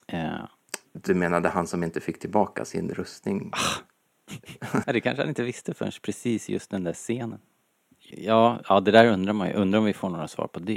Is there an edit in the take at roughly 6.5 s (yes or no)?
no